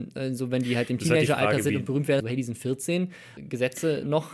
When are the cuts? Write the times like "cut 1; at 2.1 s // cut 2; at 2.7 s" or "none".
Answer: cut 1; at 2.2 s // cut 2; at 3.4 s